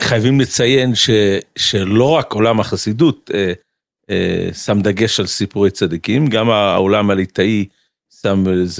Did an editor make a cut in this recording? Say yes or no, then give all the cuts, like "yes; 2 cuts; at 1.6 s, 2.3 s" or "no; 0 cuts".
no; 0 cuts